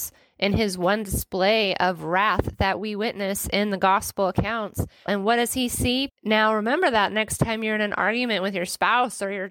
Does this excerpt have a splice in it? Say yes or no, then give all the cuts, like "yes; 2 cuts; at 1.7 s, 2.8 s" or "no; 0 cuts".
yes; 2 cuts; at 5.1 s, 6.1 s